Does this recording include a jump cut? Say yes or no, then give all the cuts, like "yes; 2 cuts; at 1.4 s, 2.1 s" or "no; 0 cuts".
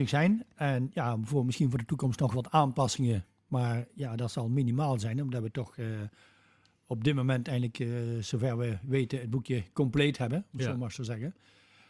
no; 0 cuts